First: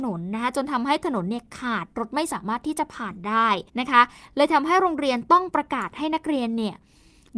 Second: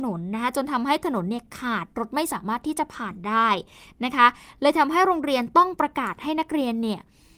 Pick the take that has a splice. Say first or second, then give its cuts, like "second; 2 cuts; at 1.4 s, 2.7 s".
first; 1 cut; at 3.7 s